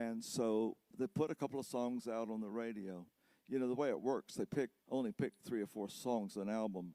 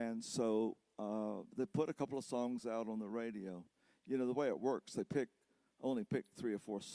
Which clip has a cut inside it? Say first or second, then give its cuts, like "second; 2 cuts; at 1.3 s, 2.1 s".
first; 2 cuts; at 0.9 s, 4.8 s